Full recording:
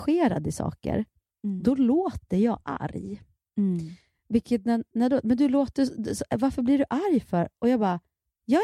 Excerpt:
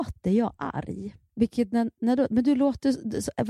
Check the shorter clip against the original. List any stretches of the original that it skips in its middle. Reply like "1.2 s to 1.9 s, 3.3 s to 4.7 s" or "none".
3.4 s to 4.2 s